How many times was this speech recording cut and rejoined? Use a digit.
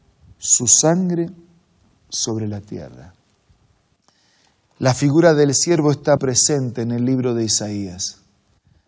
1